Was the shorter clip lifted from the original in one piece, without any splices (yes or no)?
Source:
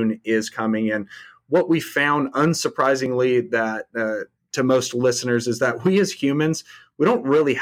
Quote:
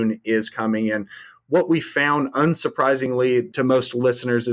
no